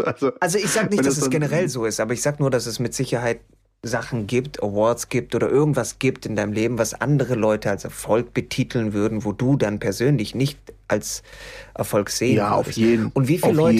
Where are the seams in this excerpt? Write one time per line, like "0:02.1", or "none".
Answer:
none